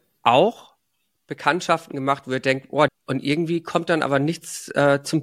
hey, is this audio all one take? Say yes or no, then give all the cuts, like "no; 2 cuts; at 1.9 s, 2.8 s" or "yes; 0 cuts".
no; 1 cut; at 2.9 s